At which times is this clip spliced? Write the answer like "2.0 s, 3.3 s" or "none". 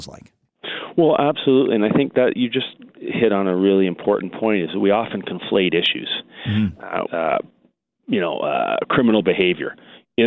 7.1 s

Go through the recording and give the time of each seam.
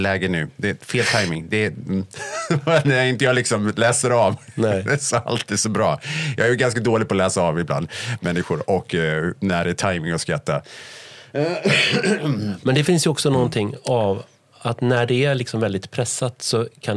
none

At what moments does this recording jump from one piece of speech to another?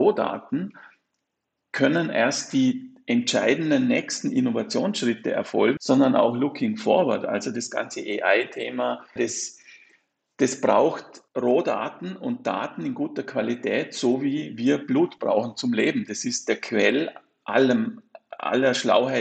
5.8 s, 9.2 s, 11.3 s

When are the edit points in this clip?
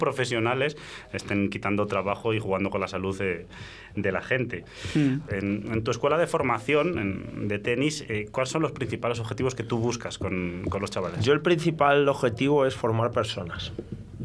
5.3 s

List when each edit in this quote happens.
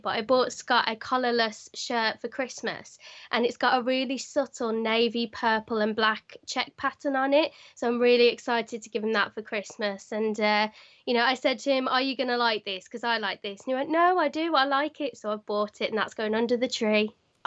none

